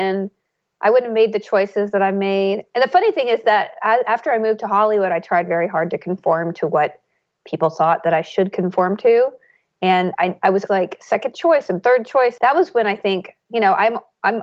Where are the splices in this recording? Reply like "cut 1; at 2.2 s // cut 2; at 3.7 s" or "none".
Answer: cut 1; at 10.7 s // cut 2; at 12.4 s